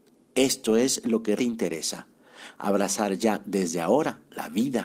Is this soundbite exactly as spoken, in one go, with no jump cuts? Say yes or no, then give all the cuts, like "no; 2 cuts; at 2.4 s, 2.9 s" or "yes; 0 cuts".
no; 1 cut; at 1.4 s